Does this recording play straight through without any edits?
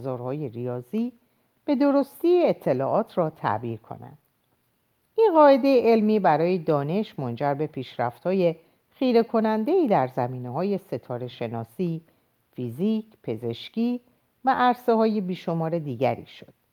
yes; 0 cuts

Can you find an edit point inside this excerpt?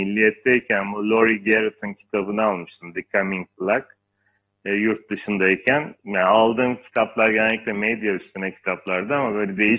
yes; 1 cut; at 6.0 s

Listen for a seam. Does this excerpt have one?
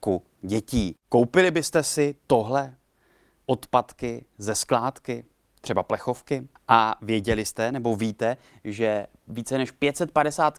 yes; 2 cuts; at 1.0 s, 6.6 s

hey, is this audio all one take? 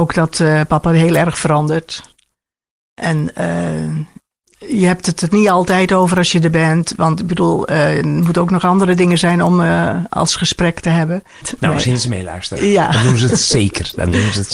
no; 2 cuts; at 4.4 s, 11.4 s

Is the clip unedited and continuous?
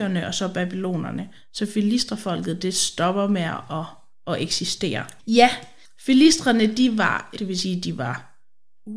no; 2 cuts; at 5.2 s, 7.4 s

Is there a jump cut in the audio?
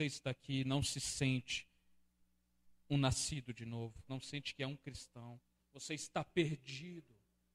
yes; 2 cuts; at 4.1 s, 5.6 s

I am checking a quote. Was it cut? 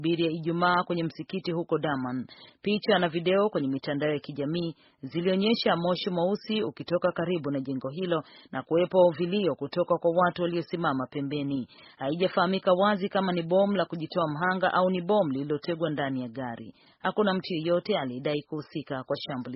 no; 0 cuts

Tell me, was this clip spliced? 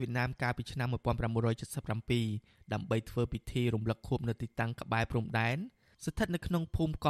no; 0 cuts

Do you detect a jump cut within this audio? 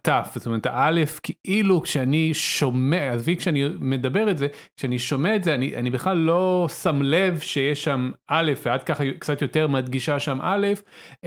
no; 0 cuts

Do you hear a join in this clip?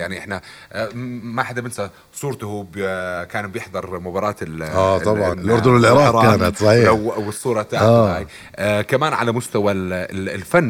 yes; 1 cut; at 5.3 s

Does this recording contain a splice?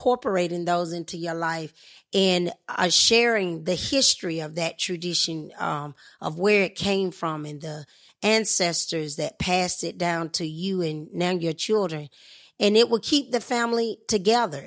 no; 0 cuts

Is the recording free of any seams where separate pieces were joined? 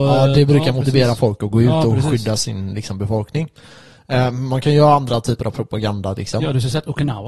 yes; 0 cuts

